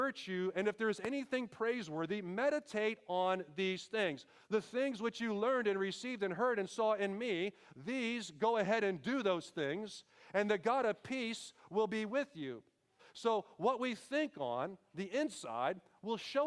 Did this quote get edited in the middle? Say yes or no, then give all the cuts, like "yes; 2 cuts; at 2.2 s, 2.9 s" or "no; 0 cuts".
yes; 2 cuts; at 4.4 s, 13.0 s